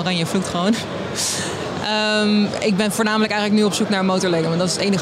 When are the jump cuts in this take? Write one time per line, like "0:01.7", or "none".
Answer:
none